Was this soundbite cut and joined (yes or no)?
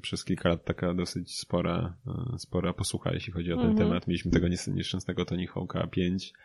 no